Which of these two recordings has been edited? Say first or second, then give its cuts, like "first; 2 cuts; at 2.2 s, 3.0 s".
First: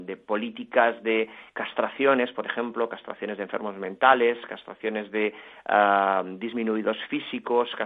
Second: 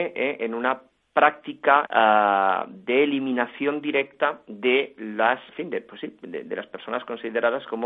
second; 2 cuts; at 1.9 s, 5.5 s